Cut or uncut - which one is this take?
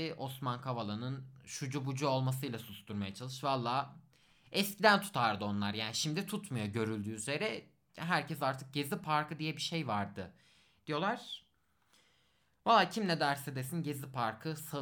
uncut